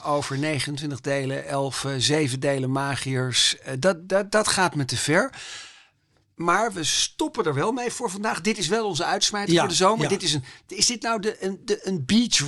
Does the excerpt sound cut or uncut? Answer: uncut